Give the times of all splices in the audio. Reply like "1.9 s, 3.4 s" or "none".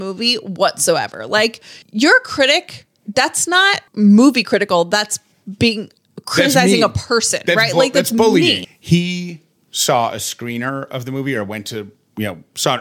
1.8 s, 3.9 s, 8.6 s